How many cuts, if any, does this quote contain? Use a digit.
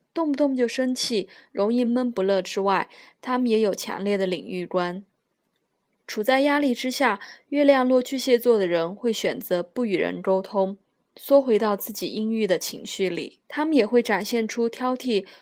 2